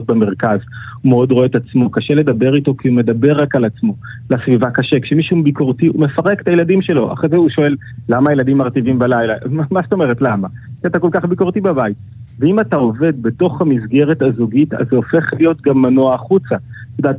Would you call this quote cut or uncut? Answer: uncut